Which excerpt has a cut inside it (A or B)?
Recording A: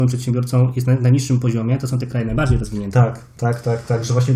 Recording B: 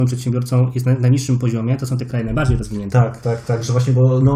B